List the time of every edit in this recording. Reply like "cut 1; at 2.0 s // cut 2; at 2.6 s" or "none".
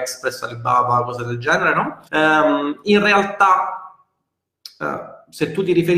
cut 1; at 2.0 s